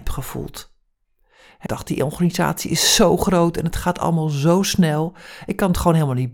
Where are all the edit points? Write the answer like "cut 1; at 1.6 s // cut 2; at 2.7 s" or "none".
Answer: cut 1; at 1.7 s